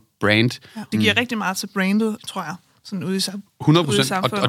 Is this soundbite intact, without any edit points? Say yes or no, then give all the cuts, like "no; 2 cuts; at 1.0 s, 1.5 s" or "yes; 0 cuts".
no; 2 cuts; at 0.9 s, 2.2 s